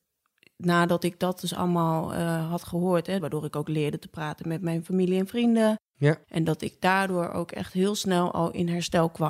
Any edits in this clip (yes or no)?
yes